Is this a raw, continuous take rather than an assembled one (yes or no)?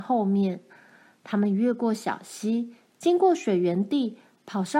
yes